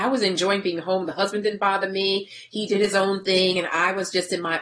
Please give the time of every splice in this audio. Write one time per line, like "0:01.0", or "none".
none